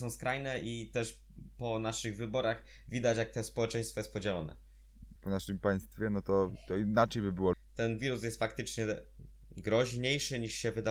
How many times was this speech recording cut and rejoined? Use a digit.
2